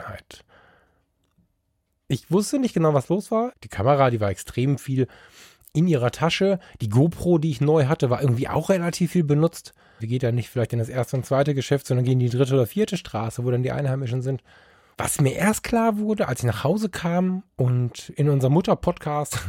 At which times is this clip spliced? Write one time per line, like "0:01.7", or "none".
0:03.5
0:10.0
0:14.9